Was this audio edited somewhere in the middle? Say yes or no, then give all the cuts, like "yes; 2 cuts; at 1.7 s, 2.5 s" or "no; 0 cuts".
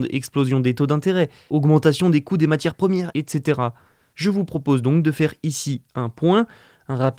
yes; 1 cut; at 3.1 s